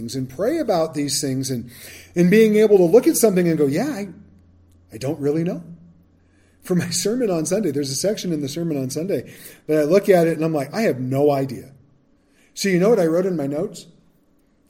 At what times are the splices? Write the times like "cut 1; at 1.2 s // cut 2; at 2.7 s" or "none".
none